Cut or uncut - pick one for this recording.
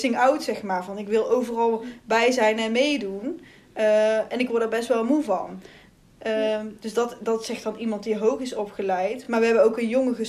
uncut